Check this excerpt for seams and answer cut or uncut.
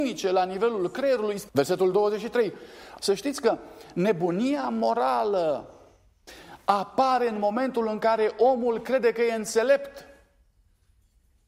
cut